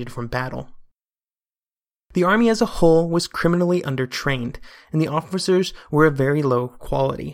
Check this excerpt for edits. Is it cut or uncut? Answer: uncut